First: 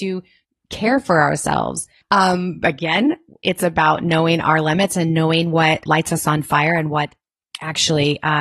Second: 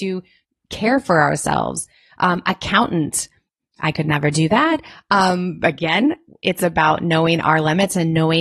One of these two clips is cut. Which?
first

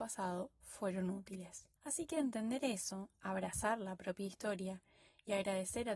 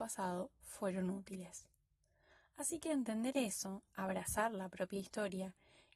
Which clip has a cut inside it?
first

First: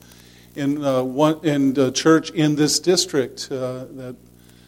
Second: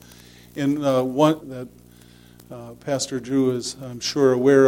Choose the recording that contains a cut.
second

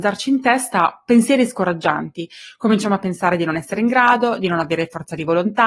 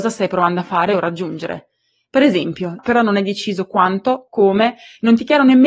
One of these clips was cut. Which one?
second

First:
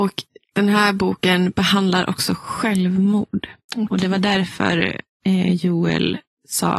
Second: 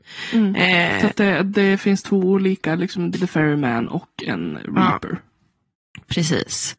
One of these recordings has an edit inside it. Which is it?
second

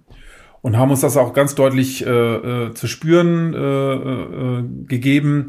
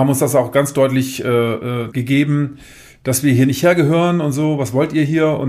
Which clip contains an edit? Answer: second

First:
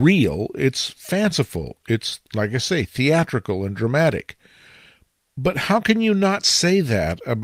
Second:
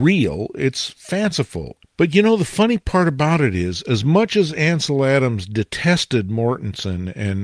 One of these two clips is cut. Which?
second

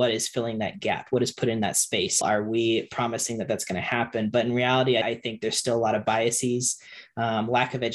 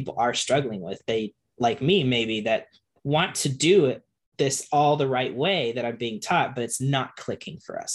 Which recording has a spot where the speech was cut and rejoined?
first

